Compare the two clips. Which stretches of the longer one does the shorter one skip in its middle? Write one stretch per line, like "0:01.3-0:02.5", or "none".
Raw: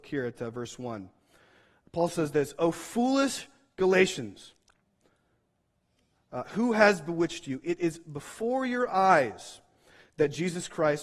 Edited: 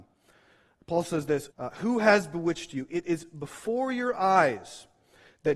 0:02.6-0:06.2